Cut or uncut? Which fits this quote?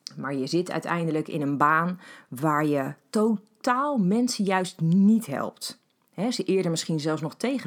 uncut